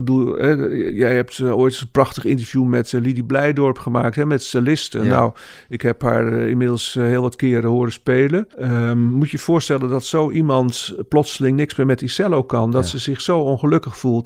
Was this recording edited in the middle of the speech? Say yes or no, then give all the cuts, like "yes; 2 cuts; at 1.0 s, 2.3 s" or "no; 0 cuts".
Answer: yes; 1 cut; at 8.5 s